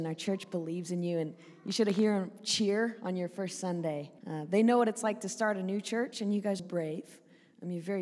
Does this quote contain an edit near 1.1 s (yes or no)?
no